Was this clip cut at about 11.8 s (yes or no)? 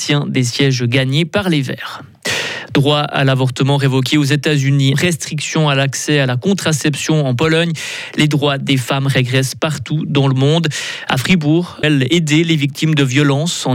yes